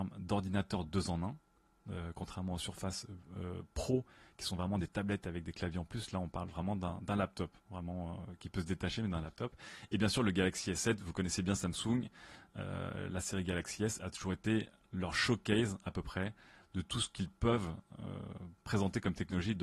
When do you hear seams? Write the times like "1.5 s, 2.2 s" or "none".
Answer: none

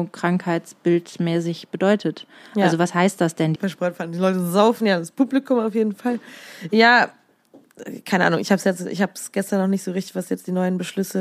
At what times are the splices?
3.5 s

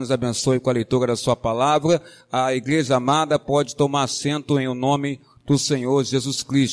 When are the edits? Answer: none

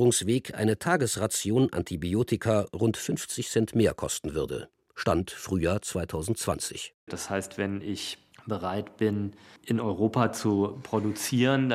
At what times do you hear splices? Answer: 7.1 s

